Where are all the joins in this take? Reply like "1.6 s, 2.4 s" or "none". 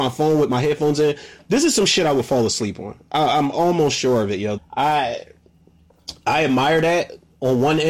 4.6 s